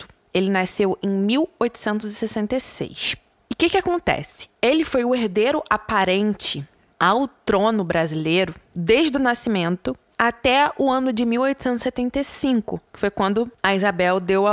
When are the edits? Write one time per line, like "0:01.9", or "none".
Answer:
none